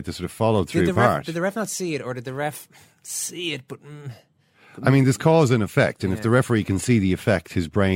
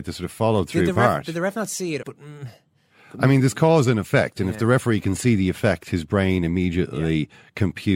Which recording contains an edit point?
second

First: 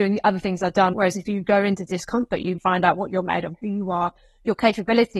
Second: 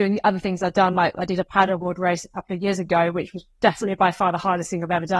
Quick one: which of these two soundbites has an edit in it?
first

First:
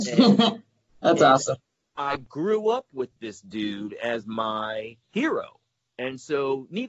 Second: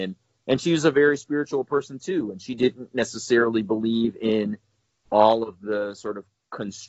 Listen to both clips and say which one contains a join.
first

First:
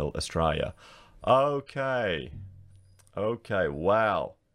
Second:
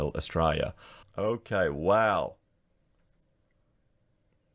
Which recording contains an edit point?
second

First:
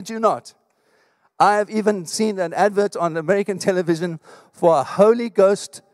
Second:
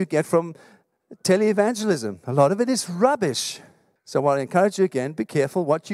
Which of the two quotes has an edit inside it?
second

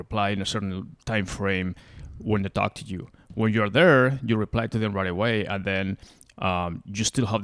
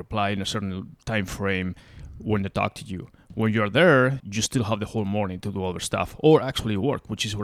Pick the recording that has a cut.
second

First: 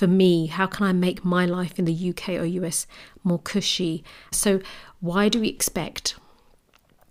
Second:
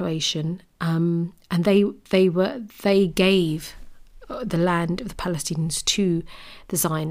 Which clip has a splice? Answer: first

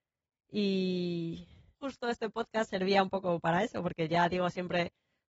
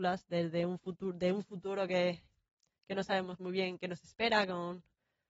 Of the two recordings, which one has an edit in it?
first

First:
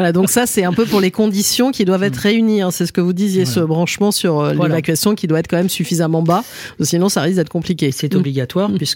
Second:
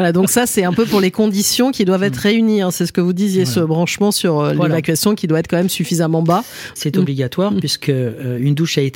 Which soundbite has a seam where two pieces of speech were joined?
second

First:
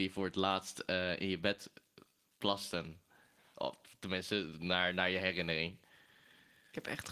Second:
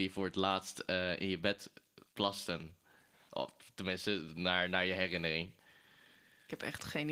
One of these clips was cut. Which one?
second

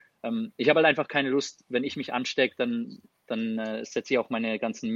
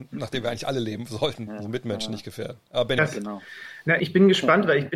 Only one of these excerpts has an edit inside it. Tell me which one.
second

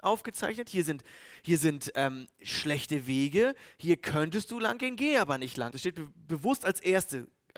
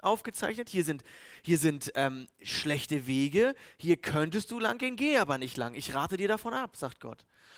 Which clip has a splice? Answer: first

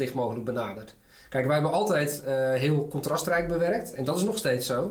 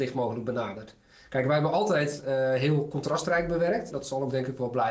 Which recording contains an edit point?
second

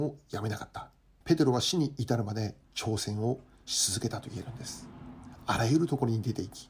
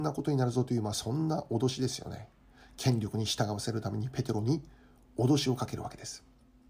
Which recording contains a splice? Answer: first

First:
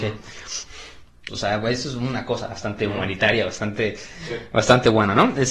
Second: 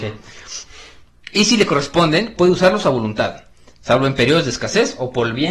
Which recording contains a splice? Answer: first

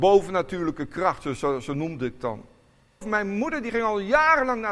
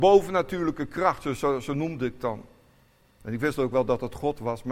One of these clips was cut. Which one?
first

